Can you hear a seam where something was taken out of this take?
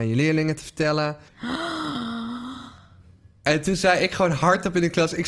yes; 1 cut; at 1.3 s

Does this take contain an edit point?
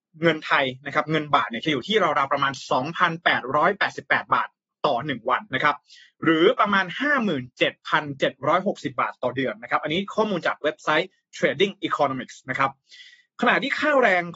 yes; 1 cut; at 5.5 s

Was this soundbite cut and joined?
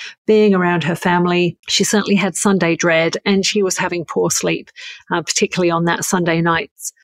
yes; 1 cut; at 1.6 s

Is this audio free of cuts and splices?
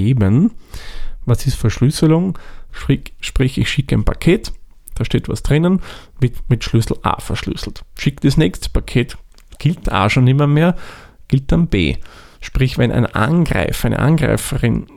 no; 1 cut; at 2.7 s

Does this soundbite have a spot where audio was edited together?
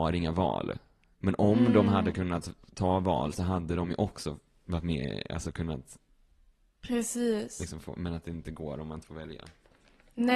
no; 0 cuts

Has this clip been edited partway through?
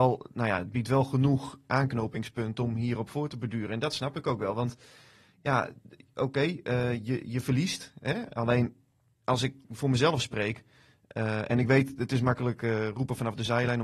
no; 0 cuts

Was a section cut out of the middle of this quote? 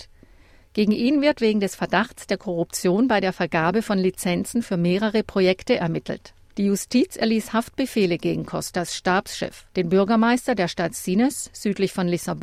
yes; 2 cuts; at 6.5 s, 9.7 s

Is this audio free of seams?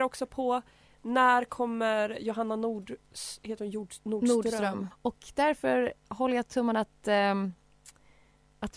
no; 1 cut; at 4.9 s

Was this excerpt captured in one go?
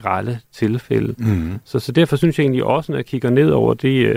yes; 0 cuts

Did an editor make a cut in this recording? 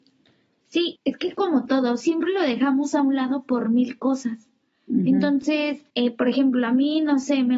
yes; 2 cuts; at 0.9 s, 5.9 s

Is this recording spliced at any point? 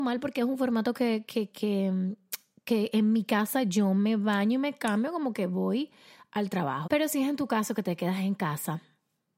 yes; 2 cuts; at 1.5 s, 6.8 s

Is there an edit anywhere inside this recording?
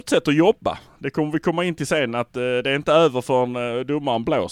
no; 0 cuts

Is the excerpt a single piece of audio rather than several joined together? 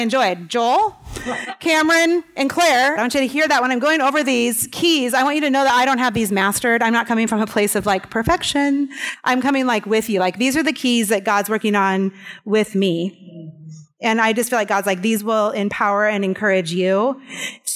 no; 1 cut; at 3.0 s

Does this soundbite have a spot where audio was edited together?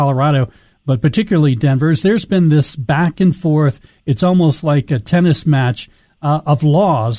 no; 0 cuts

